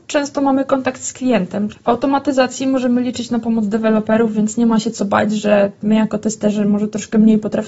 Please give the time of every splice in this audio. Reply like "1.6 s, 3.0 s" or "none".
1.7 s